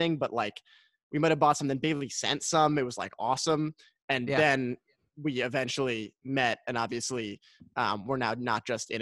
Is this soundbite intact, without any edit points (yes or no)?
yes